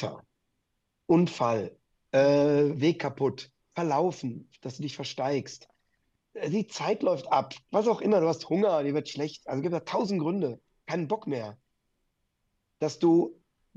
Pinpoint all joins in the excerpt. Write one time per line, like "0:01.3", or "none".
none